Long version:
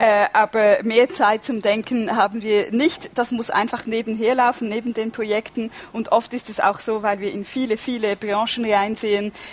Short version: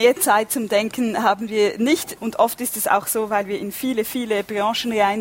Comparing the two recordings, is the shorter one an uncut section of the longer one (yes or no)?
no